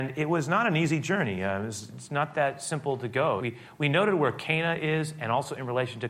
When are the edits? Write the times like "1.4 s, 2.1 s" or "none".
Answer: 3.4 s